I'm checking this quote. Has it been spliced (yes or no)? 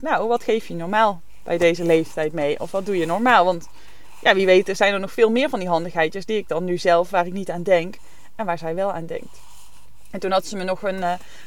no